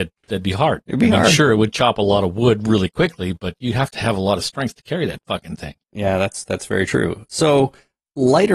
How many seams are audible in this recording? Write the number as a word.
zero